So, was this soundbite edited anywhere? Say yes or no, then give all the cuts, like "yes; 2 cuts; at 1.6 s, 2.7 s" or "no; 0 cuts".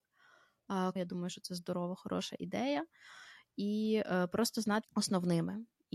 yes; 2 cuts; at 1.0 s, 4.8 s